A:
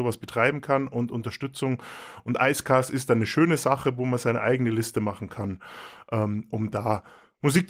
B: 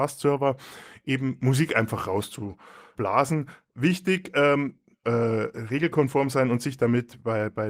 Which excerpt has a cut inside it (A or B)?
B